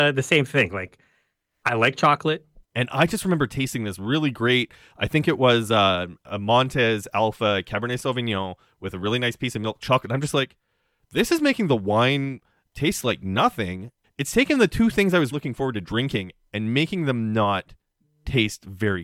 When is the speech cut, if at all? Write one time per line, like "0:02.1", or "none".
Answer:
0:02.6
0:14.0
0:15.3